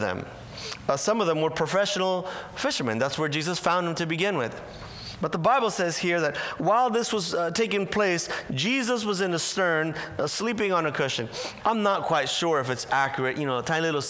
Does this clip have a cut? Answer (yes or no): yes